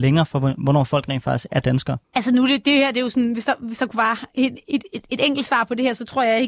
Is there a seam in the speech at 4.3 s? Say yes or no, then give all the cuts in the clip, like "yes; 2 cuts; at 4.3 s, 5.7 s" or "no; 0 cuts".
no; 1 cut; at 2.0 s